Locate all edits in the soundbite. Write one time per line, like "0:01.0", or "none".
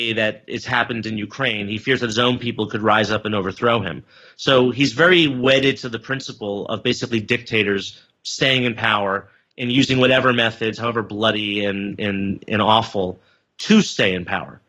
none